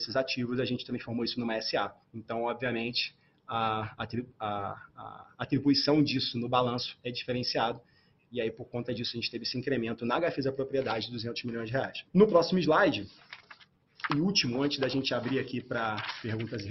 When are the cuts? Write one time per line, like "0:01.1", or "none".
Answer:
0:02.0
0:12.1